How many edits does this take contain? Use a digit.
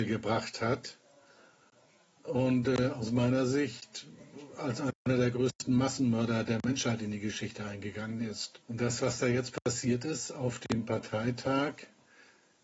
0